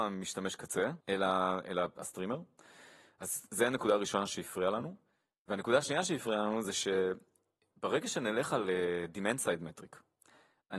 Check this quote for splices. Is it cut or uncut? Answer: cut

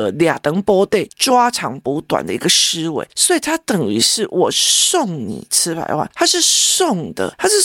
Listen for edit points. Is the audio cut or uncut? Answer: uncut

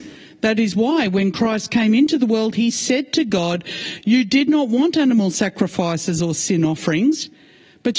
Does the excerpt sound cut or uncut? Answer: uncut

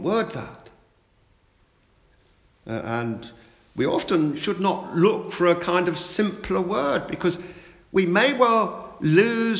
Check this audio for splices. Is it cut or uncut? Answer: uncut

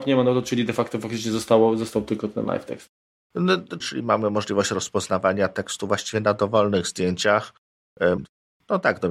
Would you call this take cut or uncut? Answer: cut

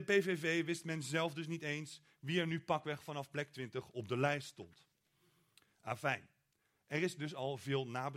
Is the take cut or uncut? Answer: uncut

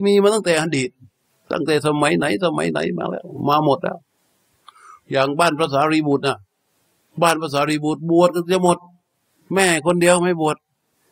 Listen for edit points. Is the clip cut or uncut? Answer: uncut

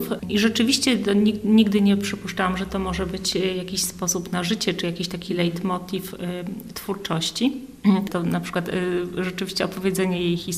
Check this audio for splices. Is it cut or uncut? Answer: cut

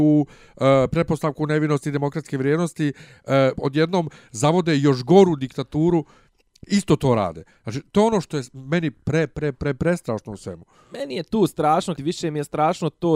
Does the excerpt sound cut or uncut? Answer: cut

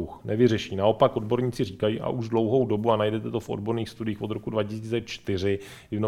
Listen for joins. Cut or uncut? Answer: uncut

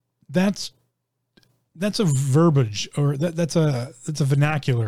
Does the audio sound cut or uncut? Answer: uncut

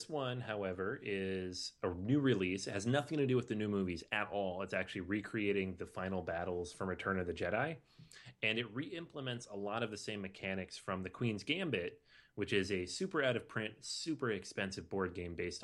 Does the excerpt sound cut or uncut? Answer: uncut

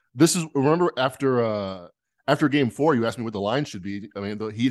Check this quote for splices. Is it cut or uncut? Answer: uncut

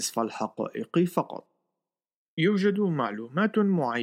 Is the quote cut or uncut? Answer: cut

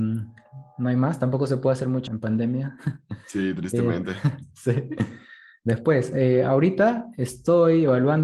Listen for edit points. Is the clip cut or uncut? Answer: cut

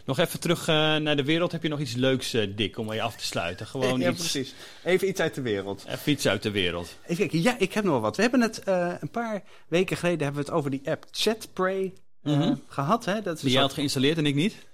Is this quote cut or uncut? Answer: uncut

